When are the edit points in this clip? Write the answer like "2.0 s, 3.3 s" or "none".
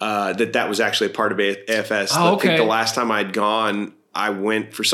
none